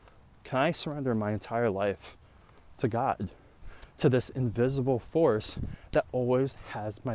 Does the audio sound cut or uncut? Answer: uncut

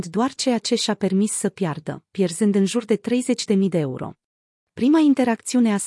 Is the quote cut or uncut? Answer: cut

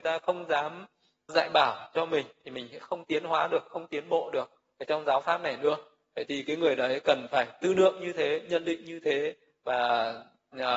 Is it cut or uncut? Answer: cut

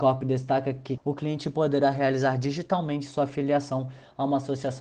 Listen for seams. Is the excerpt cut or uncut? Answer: cut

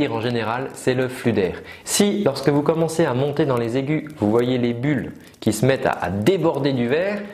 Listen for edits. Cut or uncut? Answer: cut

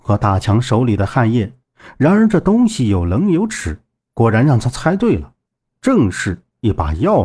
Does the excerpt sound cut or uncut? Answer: uncut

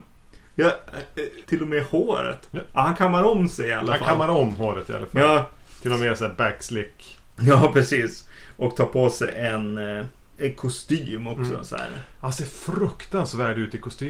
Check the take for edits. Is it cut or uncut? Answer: cut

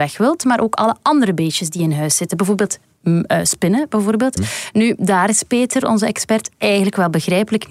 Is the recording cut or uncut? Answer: cut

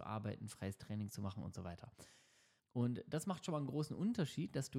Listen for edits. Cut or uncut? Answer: cut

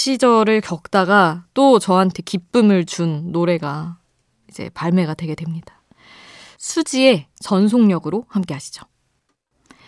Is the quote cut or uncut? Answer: uncut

